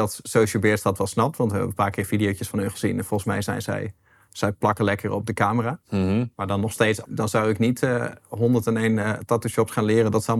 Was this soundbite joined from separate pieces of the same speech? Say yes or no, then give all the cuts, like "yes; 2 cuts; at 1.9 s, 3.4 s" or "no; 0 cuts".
yes; 1 cut; at 7.0 s